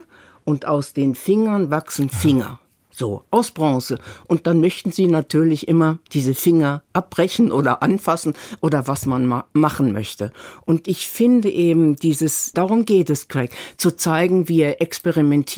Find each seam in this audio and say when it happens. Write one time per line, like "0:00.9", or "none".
0:06.1
0:12.5